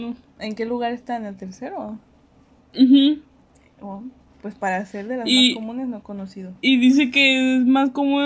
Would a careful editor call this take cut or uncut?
uncut